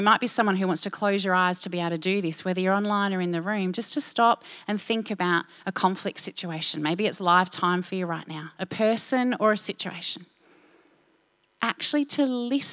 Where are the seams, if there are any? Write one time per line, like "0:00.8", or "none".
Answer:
0:11.5